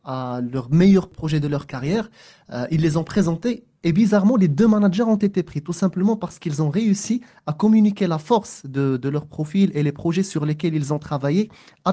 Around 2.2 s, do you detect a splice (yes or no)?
no